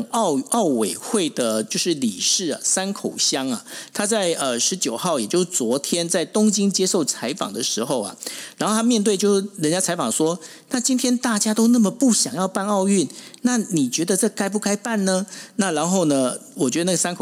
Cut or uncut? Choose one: uncut